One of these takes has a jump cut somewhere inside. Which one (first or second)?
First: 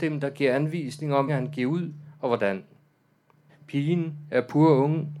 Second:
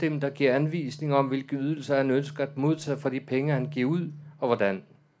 first